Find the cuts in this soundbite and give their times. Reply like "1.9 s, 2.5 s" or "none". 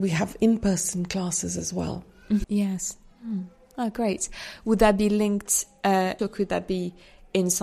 2.4 s, 6.2 s